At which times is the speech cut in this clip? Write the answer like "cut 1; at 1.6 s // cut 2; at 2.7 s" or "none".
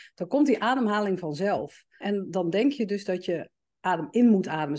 cut 1; at 2.0 s